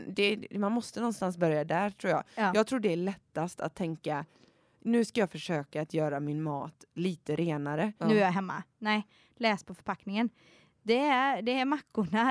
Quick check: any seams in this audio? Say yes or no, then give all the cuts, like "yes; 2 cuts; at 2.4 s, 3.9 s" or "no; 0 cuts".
yes; 2 cuts; at 8.0 s, 10.3 s